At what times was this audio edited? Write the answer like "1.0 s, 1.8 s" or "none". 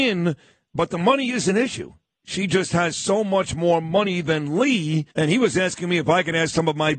5.1 s